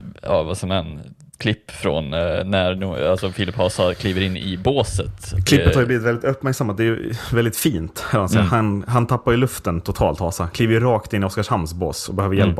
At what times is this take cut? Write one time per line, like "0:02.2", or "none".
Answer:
none